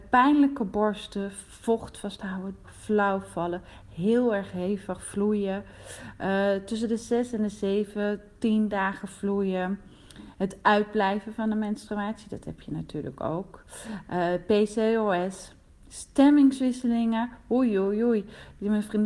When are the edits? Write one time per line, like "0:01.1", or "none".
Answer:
0:02.6

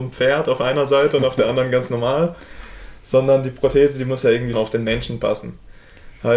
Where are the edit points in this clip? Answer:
0:04.5

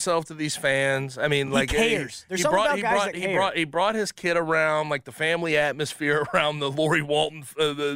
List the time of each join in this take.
none

